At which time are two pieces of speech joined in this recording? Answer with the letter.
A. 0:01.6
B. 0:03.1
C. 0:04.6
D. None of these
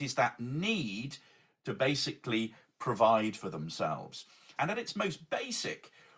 C